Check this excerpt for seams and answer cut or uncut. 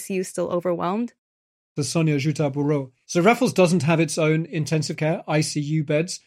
cut